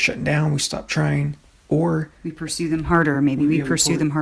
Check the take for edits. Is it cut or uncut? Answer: uncut